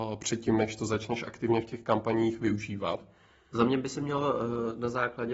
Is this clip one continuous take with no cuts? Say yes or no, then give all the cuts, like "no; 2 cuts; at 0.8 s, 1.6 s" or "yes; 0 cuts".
yes; 0 cuts